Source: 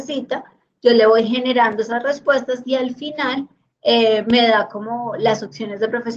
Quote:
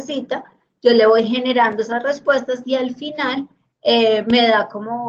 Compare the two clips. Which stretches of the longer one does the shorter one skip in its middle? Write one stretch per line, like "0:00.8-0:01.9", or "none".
none